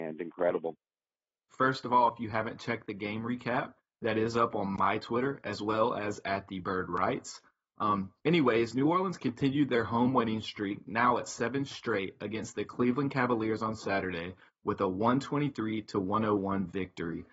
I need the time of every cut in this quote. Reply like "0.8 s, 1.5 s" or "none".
1.5 s